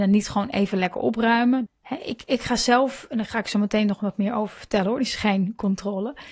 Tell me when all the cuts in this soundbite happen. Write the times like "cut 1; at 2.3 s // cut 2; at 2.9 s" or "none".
cut 1; at 1.7 s